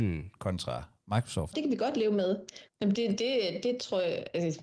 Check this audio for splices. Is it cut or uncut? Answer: cut